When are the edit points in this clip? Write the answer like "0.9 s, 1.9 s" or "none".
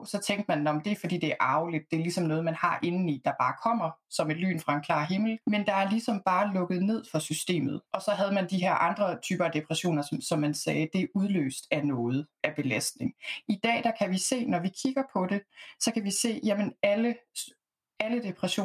5.4 s, 7.9 s